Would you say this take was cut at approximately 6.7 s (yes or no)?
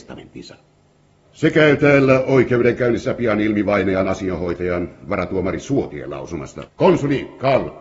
yes